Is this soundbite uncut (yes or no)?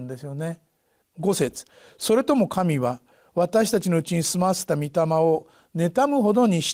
no